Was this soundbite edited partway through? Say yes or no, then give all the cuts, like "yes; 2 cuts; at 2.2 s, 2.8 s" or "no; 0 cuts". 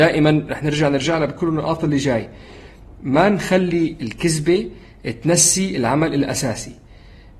no; 0 cuts